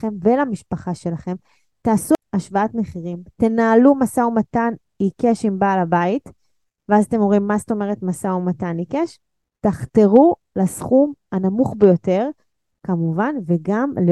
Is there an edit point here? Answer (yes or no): no